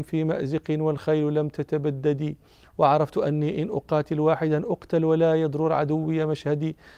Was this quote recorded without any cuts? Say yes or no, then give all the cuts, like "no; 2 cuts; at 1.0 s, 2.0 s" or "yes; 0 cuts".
yes; 0 cuts